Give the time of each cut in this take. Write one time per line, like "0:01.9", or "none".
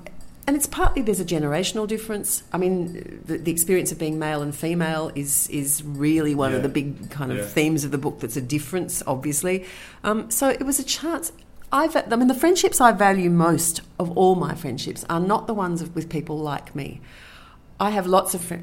none